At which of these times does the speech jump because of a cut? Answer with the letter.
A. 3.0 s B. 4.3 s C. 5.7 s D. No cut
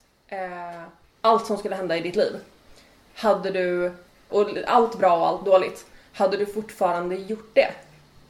B